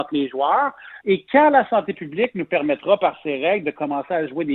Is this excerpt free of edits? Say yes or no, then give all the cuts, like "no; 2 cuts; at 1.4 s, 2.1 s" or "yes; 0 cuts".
no; 1 cut; at 1.0 s